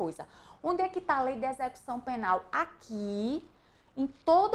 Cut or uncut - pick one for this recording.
uncut